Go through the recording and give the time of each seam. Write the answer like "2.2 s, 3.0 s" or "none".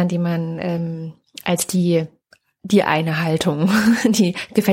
none

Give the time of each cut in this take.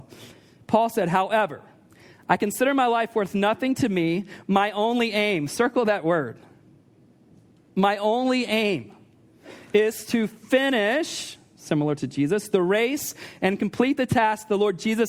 none

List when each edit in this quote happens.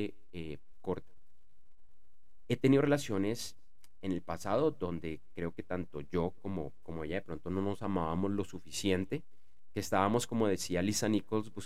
none

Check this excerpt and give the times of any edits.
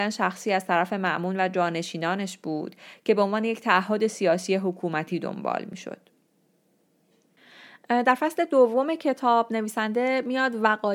none

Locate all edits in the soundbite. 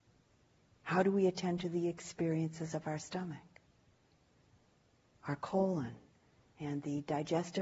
none

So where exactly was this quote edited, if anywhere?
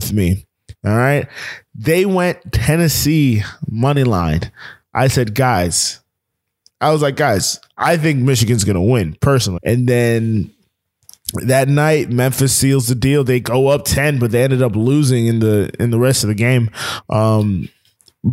9.6 s

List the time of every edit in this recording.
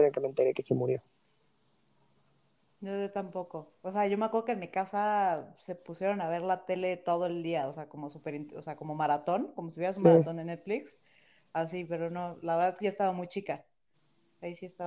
none

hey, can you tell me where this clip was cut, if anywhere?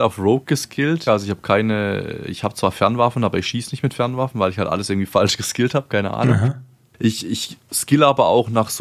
1.1 s

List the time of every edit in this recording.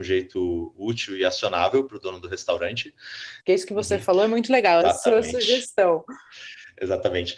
3.4 s, 4.8 s

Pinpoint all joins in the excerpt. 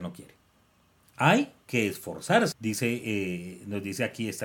2.5 s

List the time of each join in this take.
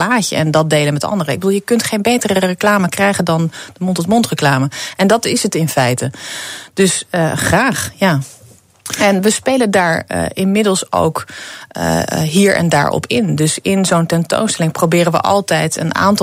none

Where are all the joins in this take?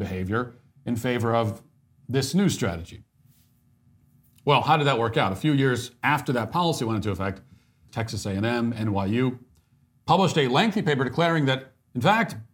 7.9 s

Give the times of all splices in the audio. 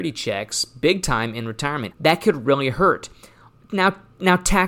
1.9 s

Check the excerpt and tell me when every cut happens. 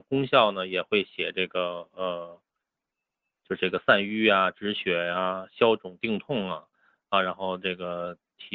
none

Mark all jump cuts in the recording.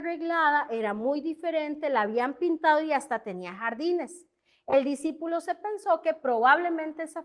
none

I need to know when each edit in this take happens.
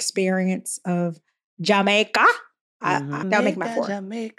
3.2 s

